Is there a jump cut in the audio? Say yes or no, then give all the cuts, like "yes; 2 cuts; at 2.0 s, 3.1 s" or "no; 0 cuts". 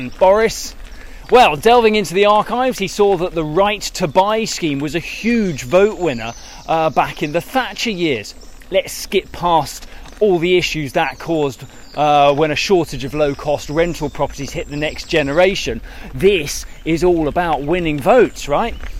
no; 0 cuts